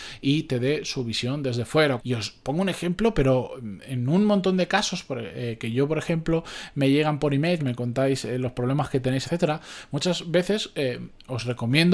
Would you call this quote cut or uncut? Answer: cut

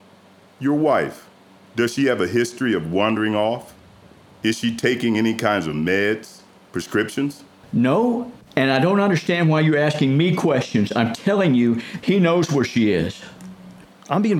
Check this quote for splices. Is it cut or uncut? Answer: cut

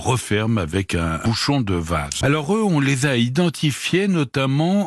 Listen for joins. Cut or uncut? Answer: cut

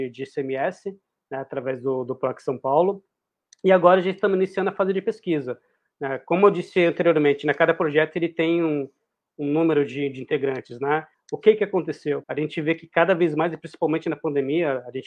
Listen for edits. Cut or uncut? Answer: cut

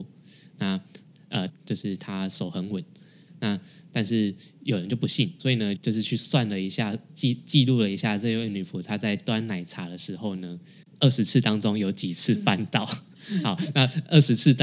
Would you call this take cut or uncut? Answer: cut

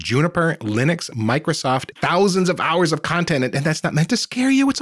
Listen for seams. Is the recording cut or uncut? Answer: cut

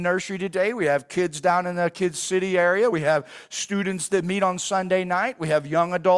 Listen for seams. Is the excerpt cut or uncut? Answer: uncut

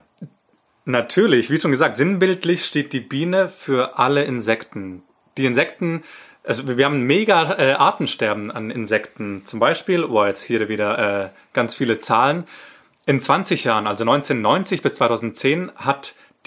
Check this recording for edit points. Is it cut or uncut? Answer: uncut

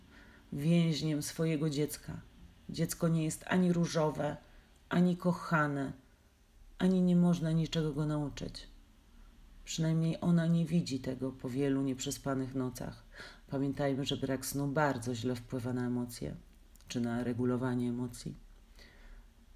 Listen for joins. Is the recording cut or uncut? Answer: uncut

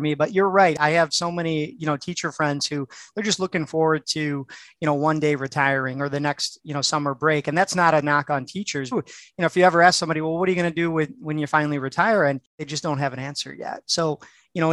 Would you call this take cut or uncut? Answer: cut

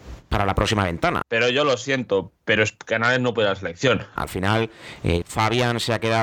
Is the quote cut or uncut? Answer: cut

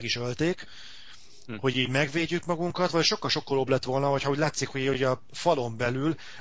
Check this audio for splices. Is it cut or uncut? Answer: uncut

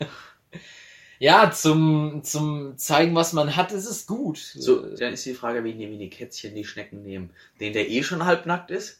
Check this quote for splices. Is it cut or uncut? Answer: cut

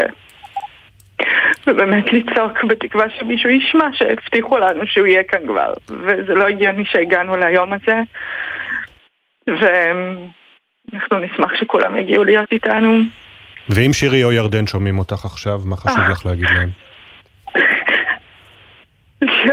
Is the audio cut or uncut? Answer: uncut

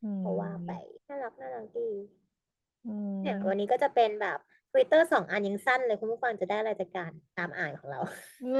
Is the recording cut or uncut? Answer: cut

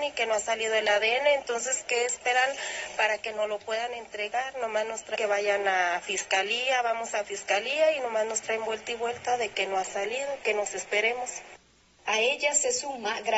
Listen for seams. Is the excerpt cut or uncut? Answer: uncut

